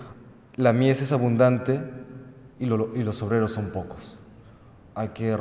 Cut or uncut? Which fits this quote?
uncut